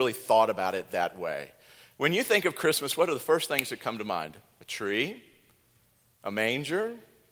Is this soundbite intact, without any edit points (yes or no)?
yes